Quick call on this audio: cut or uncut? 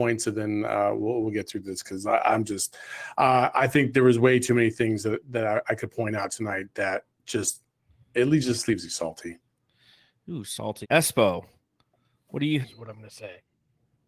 cut